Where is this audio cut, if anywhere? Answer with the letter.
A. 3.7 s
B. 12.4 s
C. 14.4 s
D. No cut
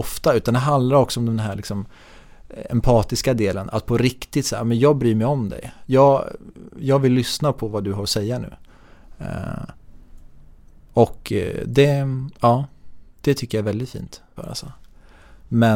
C